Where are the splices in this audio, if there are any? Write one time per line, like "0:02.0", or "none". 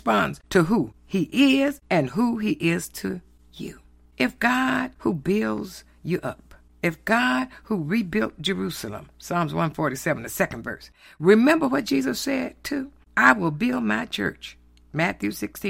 none